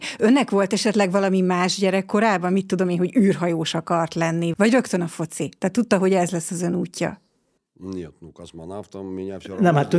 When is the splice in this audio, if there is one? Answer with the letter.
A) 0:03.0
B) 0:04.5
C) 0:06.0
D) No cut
B